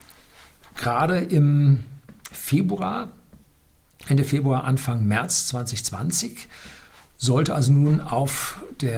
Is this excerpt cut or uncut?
uncut